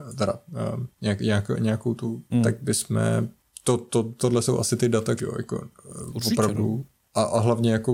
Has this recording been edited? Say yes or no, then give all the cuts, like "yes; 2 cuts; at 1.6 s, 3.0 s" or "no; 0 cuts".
yes; 2 cuts; at 2.3 s, 5.2 s